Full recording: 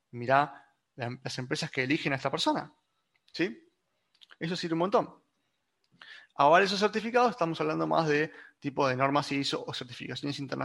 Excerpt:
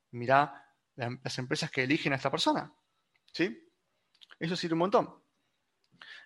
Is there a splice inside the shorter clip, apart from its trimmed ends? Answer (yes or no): no